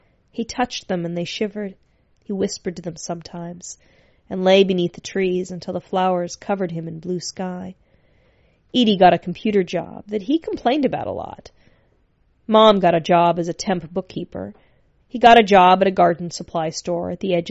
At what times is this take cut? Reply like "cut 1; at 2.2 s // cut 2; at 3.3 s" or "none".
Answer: cut 1; at 15.0 s